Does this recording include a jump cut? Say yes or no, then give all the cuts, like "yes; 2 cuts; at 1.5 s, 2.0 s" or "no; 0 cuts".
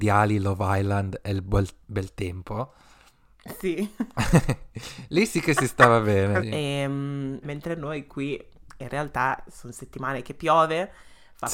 yes; 2 cuts; at 6.4 s, 7.4 s